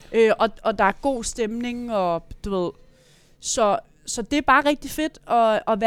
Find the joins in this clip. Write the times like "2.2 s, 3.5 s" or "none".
none